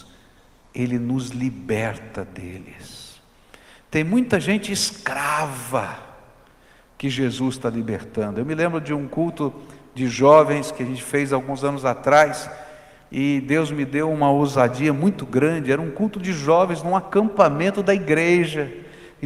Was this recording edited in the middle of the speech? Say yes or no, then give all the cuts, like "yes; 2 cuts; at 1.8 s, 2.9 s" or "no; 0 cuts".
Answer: no; 0 cuts